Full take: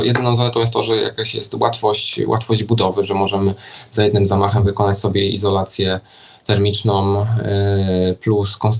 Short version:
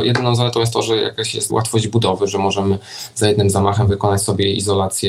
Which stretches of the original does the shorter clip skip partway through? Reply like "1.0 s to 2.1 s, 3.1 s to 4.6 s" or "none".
1.5 s to 2.3 s